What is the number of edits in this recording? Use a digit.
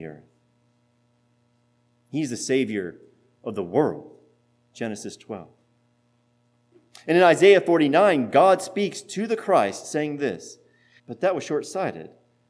2